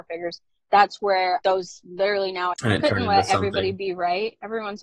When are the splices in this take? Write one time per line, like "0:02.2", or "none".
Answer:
0:01.4
0:02.5